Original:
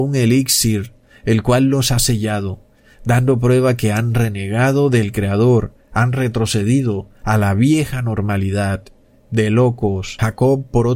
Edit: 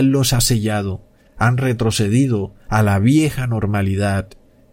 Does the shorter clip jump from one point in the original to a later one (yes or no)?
yes